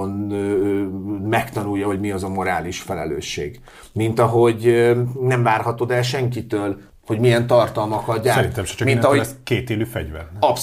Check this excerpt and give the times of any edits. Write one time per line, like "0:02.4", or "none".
0:06.9